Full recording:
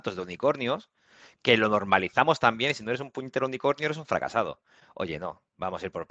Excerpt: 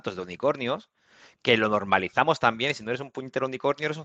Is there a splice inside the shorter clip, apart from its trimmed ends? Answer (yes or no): no